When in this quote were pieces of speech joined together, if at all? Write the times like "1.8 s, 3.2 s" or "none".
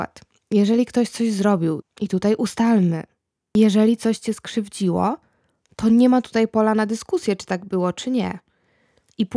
1.8 s